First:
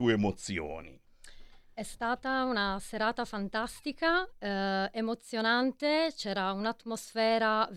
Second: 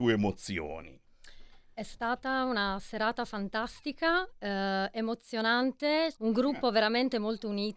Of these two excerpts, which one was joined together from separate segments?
second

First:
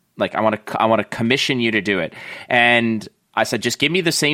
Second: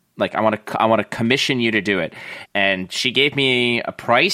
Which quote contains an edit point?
second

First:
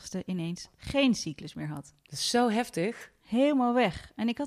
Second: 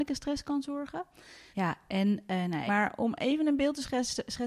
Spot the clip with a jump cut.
second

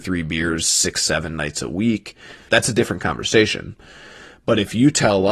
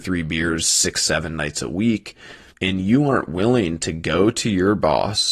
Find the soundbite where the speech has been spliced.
first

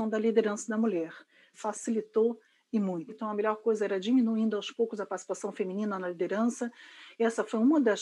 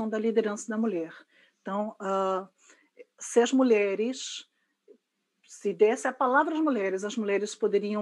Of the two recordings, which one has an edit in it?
first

